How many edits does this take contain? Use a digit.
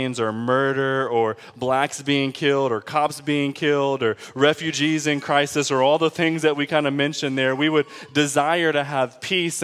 0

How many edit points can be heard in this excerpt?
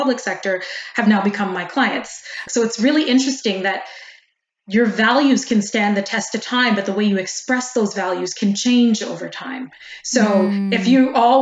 1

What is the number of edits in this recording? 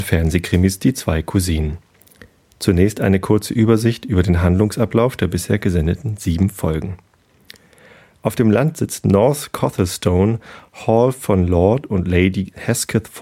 0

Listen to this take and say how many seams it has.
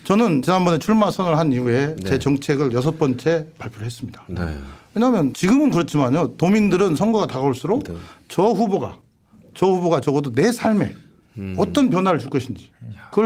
0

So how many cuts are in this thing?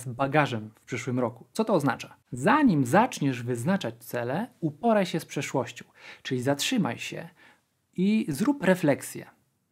0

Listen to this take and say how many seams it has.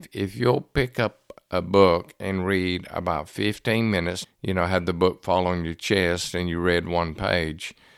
1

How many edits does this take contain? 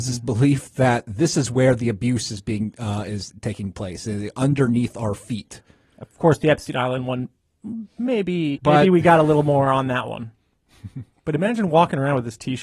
1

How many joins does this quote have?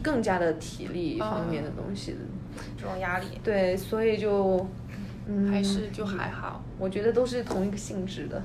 2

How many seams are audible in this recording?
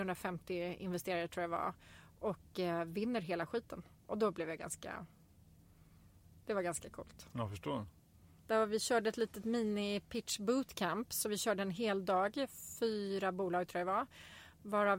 2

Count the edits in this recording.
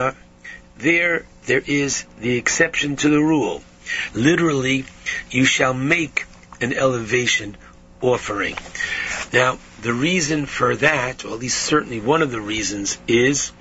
2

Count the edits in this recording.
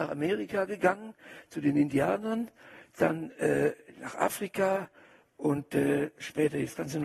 0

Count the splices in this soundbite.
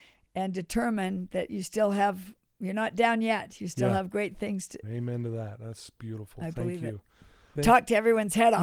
2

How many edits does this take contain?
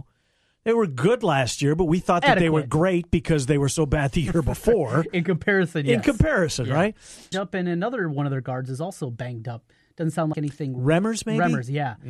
2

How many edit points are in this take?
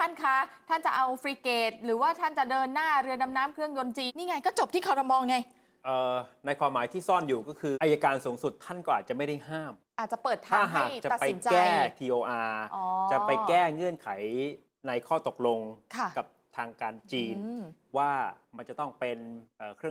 2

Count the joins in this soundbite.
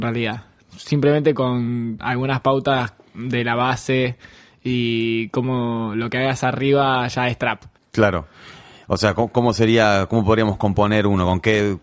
2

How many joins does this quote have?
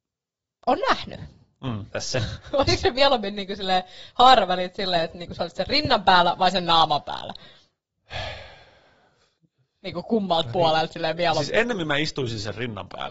1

